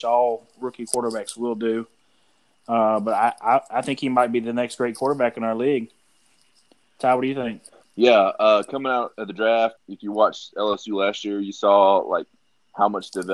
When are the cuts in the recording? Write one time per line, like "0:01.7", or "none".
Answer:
0:09.8